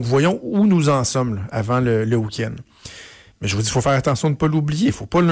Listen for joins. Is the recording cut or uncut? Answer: cut